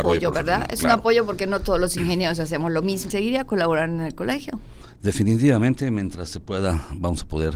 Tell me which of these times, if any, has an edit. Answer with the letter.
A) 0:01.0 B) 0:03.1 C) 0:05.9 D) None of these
B